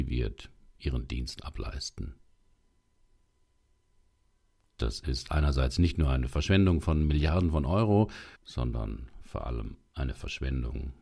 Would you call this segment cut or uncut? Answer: cut